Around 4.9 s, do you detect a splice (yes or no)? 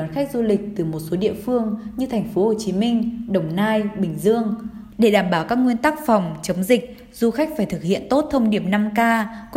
yes